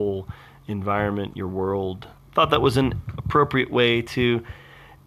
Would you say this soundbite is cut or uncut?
cut